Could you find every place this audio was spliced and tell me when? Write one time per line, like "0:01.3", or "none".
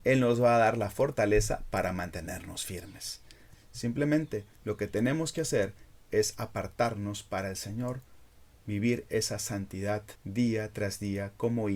0:03.5
0:10.2